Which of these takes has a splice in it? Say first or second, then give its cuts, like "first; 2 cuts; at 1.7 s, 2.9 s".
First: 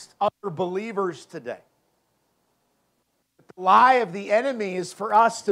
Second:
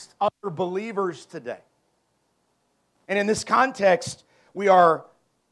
second; 1 cut; at 3.0 s